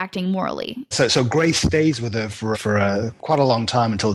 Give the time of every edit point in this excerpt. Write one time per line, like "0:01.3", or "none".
0:00.9
0:02.5